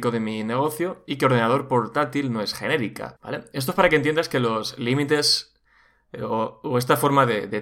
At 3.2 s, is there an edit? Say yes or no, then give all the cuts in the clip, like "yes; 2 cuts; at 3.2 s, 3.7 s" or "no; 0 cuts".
yes; 1 cut; at 3.2 s